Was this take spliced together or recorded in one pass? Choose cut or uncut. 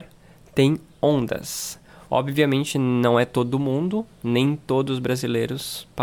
cut